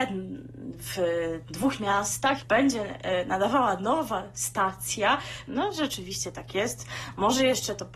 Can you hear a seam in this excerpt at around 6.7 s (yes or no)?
no